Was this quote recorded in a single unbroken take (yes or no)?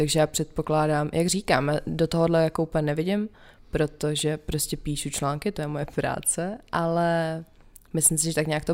yes